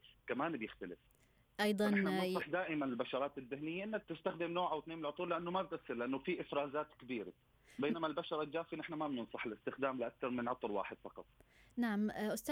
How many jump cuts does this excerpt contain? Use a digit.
1